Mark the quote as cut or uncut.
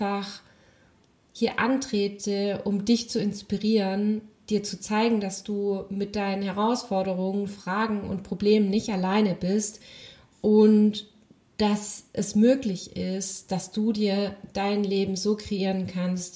uncut